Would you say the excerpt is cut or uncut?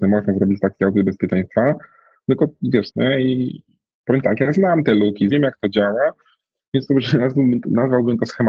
cut